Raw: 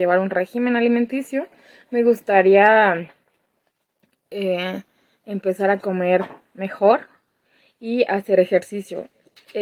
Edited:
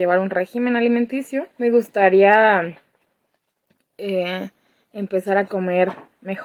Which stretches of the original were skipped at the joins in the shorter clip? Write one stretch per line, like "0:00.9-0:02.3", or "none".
0:01.5-0:01.8